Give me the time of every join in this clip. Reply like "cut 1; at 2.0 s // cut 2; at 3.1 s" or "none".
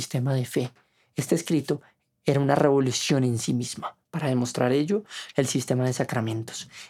cut 1; at 5.3 s